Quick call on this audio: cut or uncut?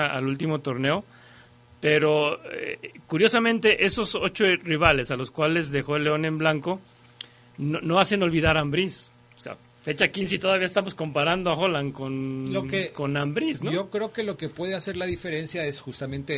uncut